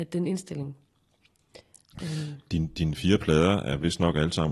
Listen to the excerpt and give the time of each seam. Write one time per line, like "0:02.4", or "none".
none